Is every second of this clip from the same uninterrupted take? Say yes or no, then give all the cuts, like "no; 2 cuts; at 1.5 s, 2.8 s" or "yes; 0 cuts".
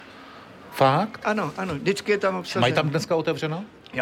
yes; 0 cuts